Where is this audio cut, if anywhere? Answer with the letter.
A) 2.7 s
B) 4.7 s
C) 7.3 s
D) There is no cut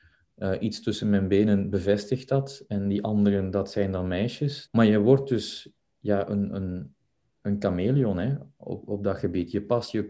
B